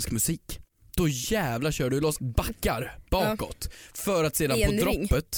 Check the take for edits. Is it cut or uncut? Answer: cut